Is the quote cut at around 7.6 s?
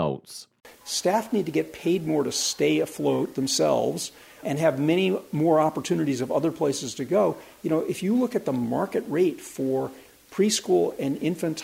yes; 1 cut; at 7.6 s

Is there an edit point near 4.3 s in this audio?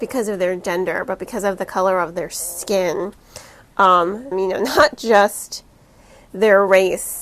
yes; 1 cut; at 4.3 s

